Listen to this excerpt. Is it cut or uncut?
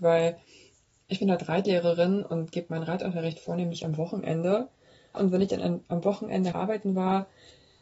cut